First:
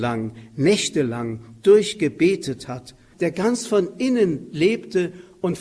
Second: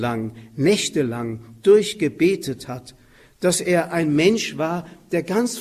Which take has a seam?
first; 1 cut; at 3.1 s

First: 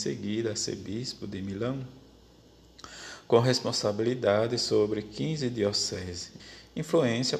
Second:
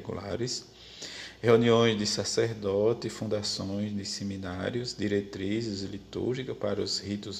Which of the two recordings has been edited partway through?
first; 1 cut; at 6.4 s

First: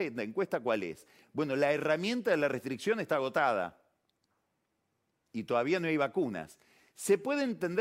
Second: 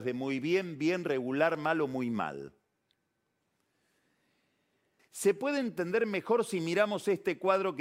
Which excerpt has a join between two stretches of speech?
second; 1 cut; at 5.0 s

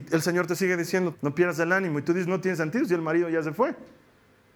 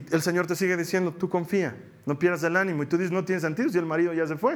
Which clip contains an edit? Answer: first; 1 cut; at 1.1 s

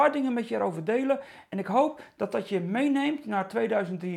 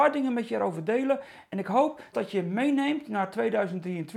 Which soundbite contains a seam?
second; 1 cut; at 2.1 s

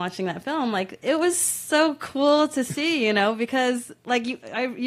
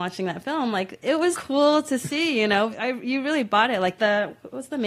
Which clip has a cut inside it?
second; 2 cuts; at 1.3 s, 2.7 s

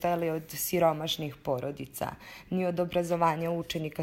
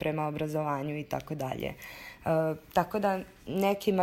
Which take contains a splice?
second; 1 cut; at 2.2 s

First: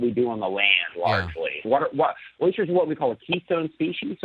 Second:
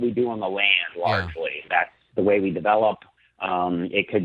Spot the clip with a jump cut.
first; 1 cut; at 1.6 s

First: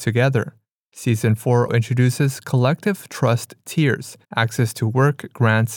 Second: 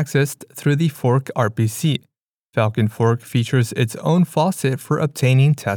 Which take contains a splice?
first; 2 cuts; at 1.7 s, 4.2 s

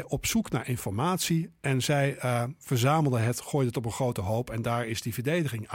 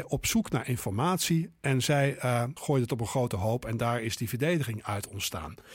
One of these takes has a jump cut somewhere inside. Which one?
second; 1 cut; at 2.6 s

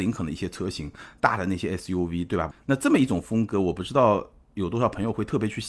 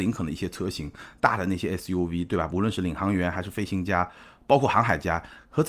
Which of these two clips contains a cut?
first; 1 cut; at 2.5 s

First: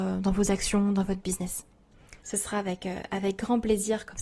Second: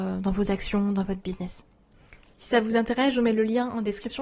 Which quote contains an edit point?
first; 1 cut; at 2.2 s

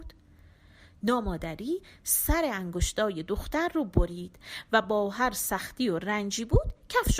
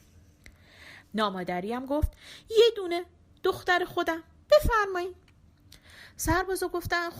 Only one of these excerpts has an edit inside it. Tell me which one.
second; 1 cut; at 1.0 s

